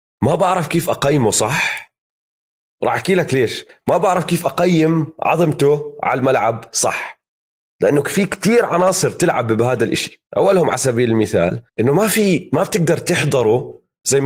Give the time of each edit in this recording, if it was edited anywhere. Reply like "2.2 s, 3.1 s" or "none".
10.3 s, 11.7 s